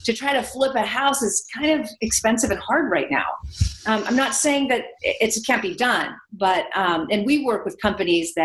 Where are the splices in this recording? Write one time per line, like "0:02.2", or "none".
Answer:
none